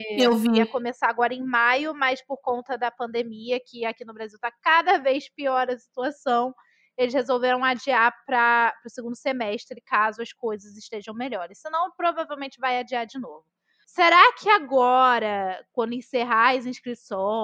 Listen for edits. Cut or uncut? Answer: cut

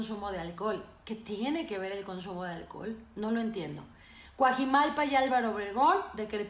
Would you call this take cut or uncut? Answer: uncut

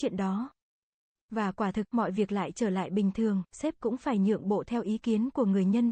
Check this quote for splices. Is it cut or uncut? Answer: cut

